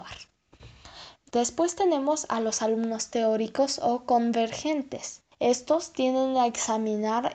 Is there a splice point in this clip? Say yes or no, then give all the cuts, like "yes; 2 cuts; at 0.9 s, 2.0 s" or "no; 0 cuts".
yes; 1 cut; at 5.3 s